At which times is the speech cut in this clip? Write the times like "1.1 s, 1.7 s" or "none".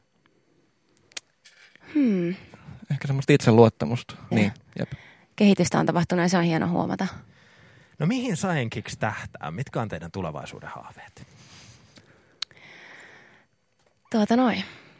4.3 s